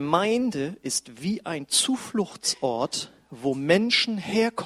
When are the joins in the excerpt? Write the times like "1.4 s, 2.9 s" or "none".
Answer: none